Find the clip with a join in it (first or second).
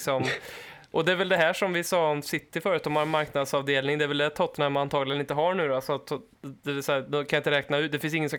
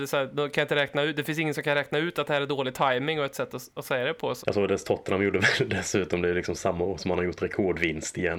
second